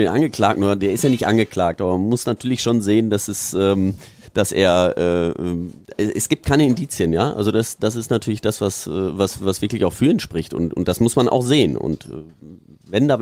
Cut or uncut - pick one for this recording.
uncut